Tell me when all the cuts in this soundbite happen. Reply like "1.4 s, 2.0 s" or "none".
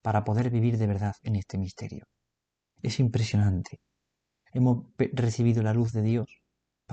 2.8 s, 4.5 s